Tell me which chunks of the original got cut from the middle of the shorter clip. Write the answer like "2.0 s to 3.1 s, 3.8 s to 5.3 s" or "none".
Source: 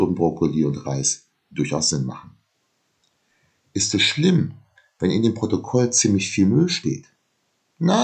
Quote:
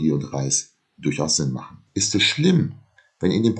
2.4 s to 3.7 s